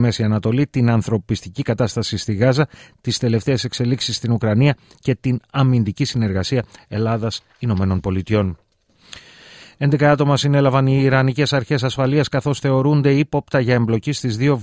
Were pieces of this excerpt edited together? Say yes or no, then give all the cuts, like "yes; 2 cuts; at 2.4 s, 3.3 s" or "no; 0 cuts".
yes; 1 cut; at 3.0 s